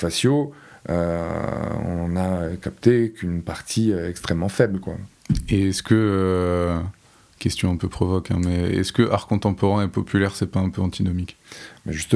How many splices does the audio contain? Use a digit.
0